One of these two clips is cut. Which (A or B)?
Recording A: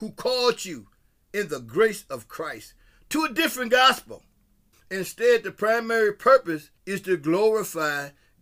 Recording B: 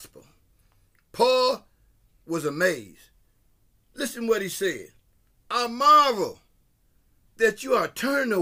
A